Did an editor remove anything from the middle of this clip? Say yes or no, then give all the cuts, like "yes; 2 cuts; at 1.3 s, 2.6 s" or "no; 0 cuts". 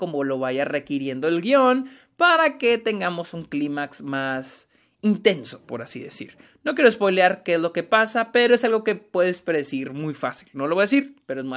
no; 0 cuts